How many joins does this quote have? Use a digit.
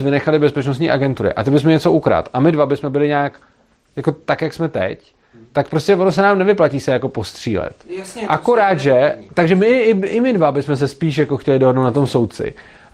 0